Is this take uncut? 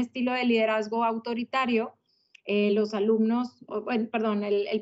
yes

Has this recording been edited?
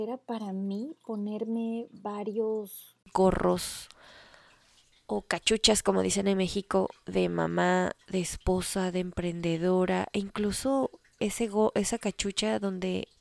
yes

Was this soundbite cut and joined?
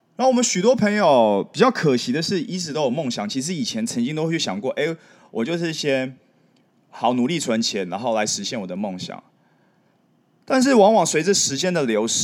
no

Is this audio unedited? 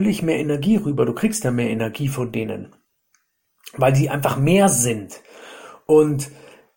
yes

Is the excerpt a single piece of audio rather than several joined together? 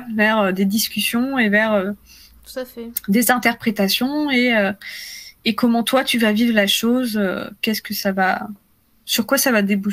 yes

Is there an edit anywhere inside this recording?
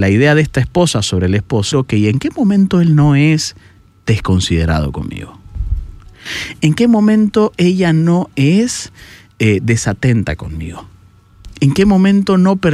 yes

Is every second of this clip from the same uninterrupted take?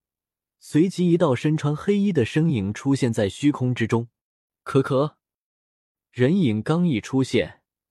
yes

